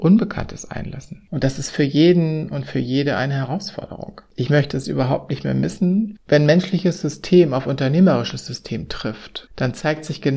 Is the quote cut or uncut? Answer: cut